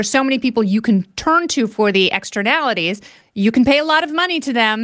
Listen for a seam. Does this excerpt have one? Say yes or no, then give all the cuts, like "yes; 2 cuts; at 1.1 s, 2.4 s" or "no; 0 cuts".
yes; 1 cut; at 3.2 s